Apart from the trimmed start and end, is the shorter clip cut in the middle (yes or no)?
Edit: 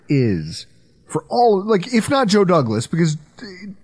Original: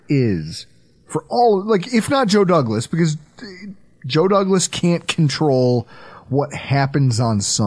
no